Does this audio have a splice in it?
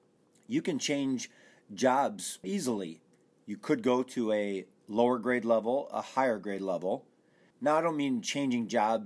yes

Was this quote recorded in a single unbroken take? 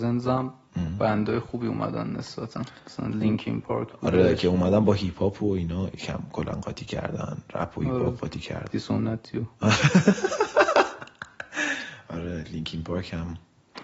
no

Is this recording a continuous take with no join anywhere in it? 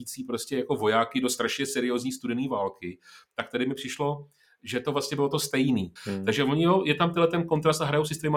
no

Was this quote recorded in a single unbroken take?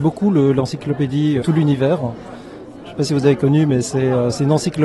no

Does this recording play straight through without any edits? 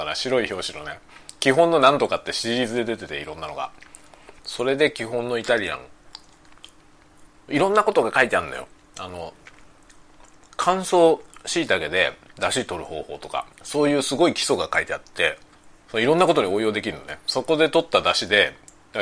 no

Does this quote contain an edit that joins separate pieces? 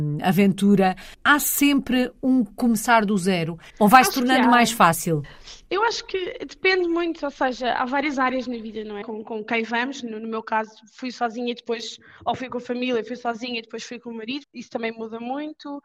yes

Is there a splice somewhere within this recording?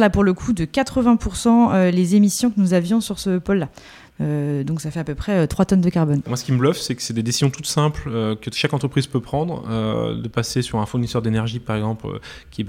no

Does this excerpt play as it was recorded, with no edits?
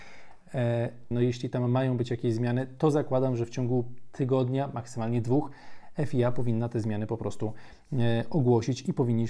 no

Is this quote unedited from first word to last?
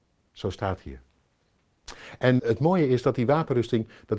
no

